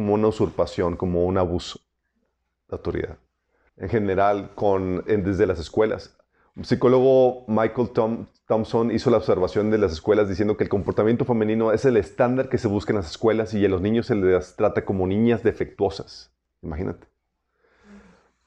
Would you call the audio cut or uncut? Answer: cut